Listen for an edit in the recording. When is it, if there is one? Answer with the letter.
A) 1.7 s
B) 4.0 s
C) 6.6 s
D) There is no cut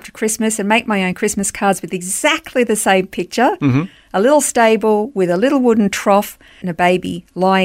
C